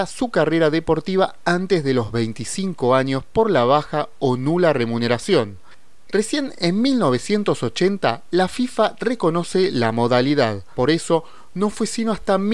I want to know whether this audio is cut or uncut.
cut